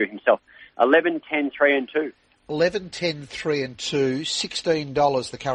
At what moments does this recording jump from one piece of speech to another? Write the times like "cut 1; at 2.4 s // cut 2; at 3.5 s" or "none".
none